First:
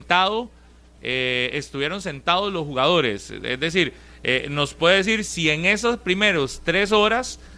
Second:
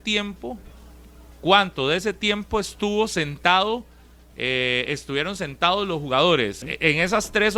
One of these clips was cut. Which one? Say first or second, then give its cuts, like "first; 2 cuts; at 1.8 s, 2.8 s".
second; 1 cut; at 6.6 s